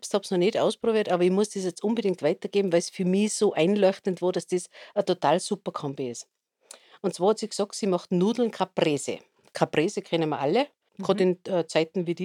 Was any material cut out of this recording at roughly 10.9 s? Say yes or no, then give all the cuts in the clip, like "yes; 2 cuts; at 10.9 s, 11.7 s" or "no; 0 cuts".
yes; 1 cut; at 10.9 s